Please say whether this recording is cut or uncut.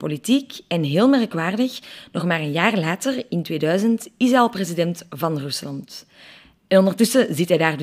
uncut